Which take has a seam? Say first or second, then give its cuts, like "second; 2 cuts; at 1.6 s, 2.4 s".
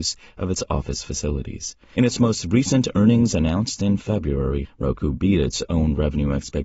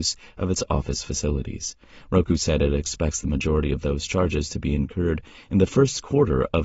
first; 2 cuts; at 1.9 s, 4.6 s